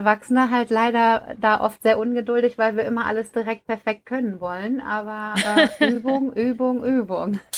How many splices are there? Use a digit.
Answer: 0